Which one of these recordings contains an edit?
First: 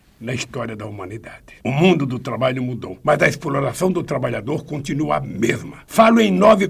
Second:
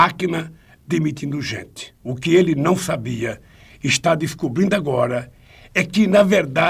second; 1 cut; at 1.9 s

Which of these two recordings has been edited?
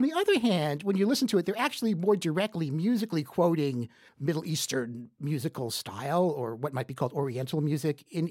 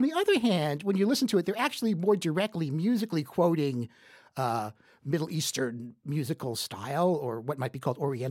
first; 1 cut; at 4.1 s

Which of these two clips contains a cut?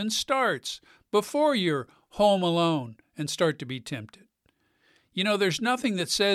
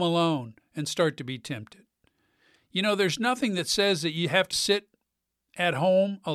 second; 1 cut; at 4.5 s

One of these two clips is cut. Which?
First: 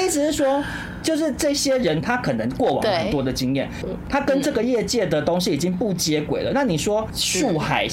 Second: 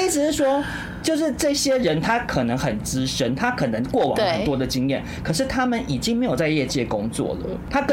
first; 2 cuts; at 2.0 s, 3.8 s

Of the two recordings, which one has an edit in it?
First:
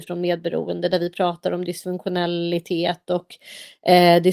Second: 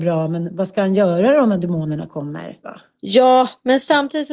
second; 1 cut; at 2.6 s

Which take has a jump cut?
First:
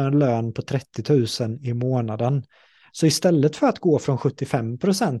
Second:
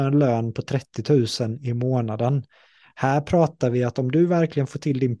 first; 1 cut; at 2.9 s

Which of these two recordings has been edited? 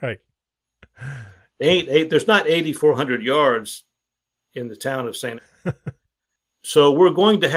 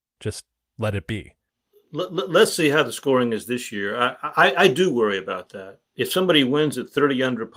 first; 1 cut; at 5.4 s

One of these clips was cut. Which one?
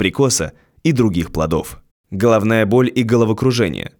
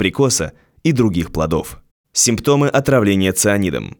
first; 1 cut; at 2.0 s

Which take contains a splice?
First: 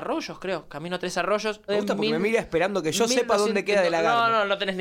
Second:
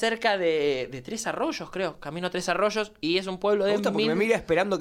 first; 1 cut; at 1.7 s

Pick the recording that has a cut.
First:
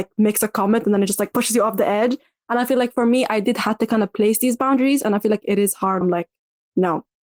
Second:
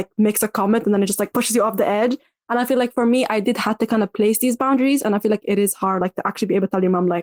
first; 1 cut; at 6.0 s

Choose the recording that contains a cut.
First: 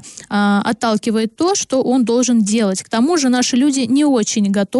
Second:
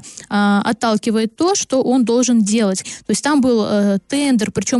second; 1 cut; at 2.8 s

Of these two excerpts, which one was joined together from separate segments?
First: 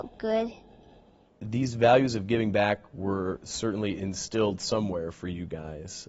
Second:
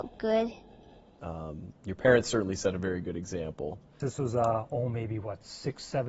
second; 2 cuts; at 1.2 s, 4.0 s

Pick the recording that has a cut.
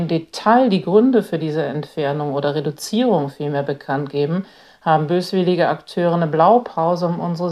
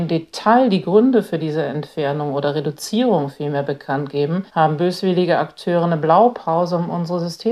second; 1 cut; at 4.5 s

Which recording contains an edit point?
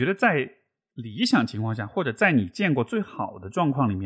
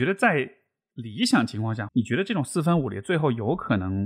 second; 1 cut; at 1.9 s

